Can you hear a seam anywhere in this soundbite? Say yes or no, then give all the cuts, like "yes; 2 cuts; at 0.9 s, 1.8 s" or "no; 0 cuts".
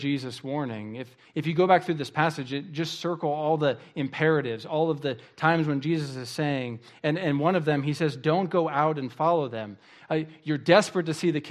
no; 0 cuts